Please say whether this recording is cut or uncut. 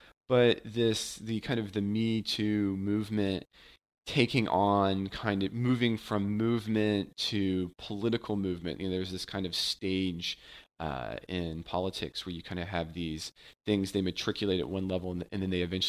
uncut